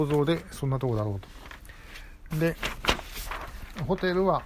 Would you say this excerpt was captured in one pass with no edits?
no; 1 cut; at 2.3 s

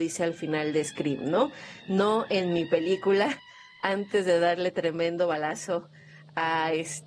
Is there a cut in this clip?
no; 0 cuts

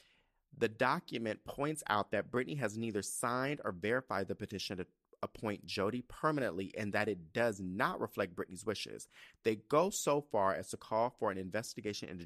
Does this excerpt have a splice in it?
no; 0 cuts

